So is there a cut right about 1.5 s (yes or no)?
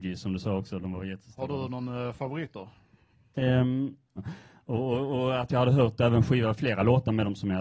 no